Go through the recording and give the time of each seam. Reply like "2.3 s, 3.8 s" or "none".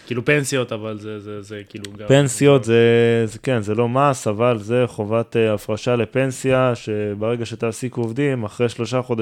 none